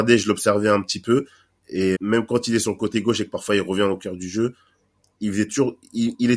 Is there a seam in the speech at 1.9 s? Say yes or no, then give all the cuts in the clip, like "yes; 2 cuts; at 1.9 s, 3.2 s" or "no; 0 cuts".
yes; 1 cut; at 1.9 s